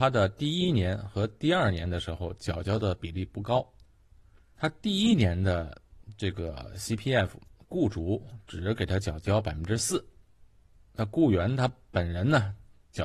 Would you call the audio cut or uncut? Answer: uncut